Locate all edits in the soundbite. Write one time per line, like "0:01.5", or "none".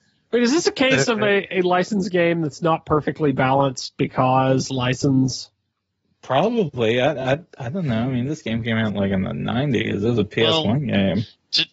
none